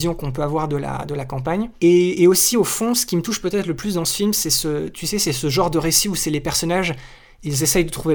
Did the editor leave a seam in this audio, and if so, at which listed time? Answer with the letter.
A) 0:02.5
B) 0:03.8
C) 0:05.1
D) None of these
D